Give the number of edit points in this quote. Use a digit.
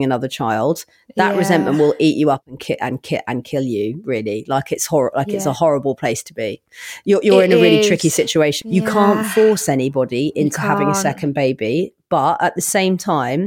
1